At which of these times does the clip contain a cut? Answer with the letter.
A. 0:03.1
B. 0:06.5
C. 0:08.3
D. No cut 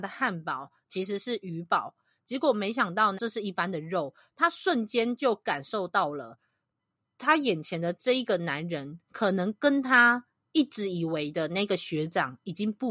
A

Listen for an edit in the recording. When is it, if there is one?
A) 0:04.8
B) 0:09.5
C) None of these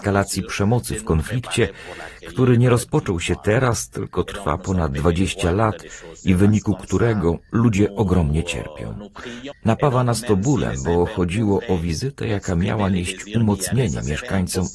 B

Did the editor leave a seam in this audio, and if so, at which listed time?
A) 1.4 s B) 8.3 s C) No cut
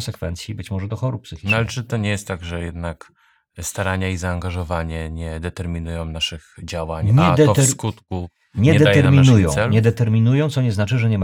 C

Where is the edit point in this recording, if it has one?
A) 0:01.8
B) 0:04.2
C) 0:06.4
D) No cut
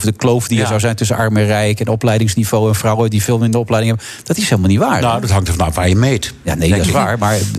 D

